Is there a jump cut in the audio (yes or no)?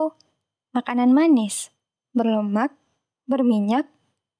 no